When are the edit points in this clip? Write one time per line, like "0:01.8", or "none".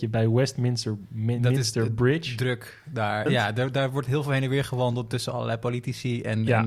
0:03.3